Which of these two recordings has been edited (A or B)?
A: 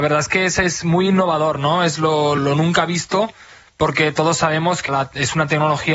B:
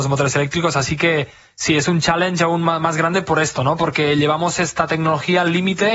A